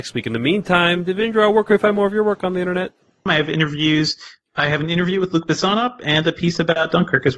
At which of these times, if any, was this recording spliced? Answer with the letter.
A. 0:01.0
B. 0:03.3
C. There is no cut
B